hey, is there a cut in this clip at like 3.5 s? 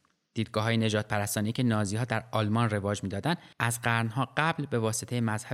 yes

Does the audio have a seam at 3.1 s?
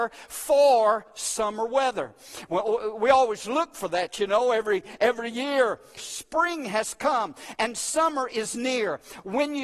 no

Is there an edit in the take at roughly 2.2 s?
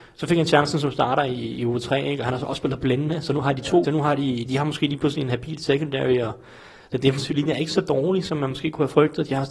no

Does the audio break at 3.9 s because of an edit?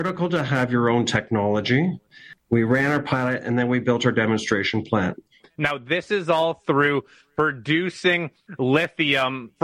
no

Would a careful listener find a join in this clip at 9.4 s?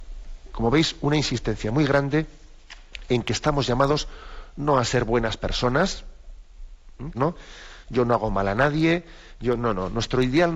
no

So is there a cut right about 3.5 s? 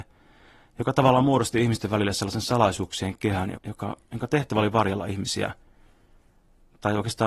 yes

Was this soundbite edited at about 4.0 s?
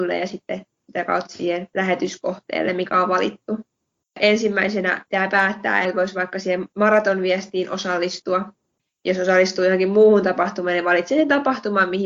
yes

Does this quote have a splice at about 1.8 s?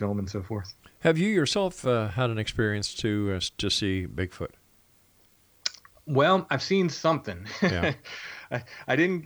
no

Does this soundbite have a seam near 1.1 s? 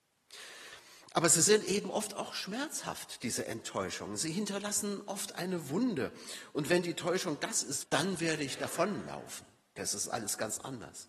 no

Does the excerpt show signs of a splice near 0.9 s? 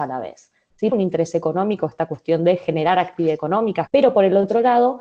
yes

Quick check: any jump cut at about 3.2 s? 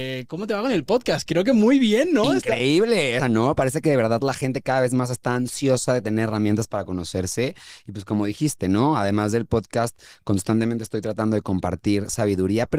yes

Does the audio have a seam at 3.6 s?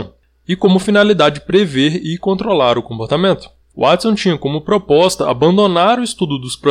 no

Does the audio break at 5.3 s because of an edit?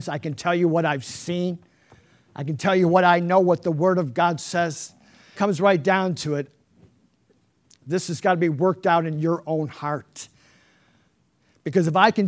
yes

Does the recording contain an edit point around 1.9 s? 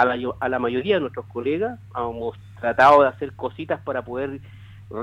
no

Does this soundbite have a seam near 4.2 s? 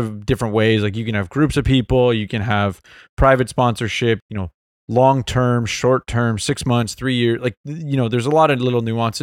yes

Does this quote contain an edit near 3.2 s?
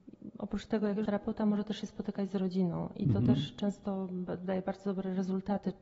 no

